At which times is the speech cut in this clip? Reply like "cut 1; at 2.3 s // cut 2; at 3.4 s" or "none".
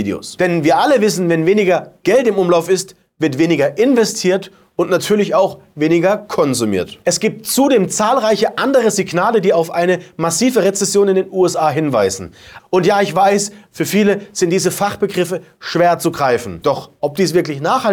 cut 1; at 12.6 s // cut 2; at 16.6 s